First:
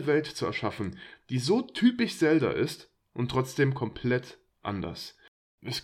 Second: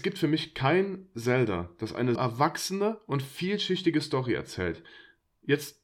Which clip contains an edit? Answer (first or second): second